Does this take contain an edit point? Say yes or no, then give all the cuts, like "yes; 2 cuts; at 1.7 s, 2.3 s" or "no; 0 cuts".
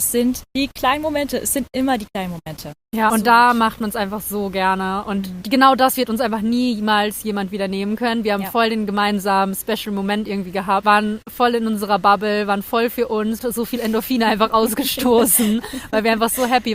yes; 1 cut; at 13.4 s